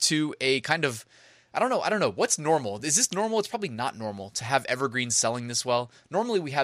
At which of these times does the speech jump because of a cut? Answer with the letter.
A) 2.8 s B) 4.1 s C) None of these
C